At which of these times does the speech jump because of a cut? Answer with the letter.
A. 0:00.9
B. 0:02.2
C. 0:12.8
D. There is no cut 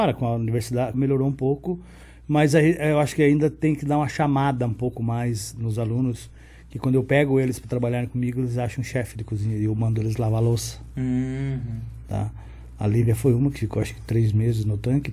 A